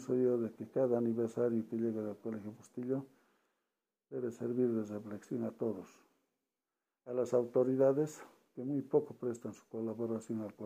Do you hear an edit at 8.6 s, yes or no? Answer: no